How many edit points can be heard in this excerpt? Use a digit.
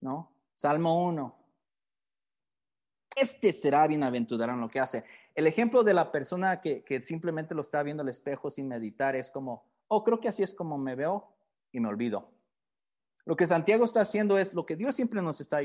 1